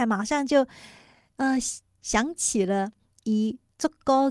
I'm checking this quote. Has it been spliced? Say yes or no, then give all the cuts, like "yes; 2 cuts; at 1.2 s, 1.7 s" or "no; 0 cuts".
no; 0 cuts